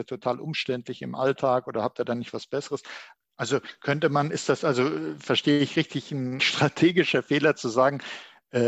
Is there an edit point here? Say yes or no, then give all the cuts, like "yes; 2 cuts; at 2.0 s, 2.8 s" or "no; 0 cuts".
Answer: yes; 2 cuts; at 3.2 s, 6.4 s